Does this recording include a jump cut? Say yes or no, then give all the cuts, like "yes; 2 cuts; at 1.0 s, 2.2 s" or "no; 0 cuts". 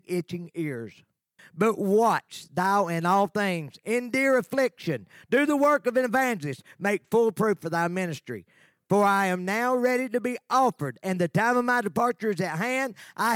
yes; 1 cut; at 1.4 s